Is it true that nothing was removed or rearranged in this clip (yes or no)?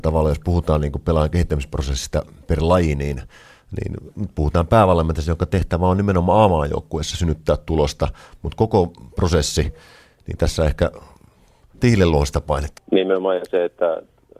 no